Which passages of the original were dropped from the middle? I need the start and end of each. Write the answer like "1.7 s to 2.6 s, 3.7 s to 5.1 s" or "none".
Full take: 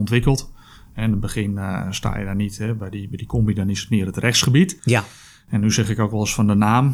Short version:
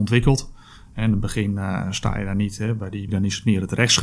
3.1 s to 3.5 s